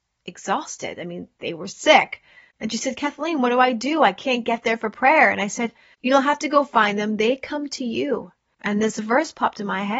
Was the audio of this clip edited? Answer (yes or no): no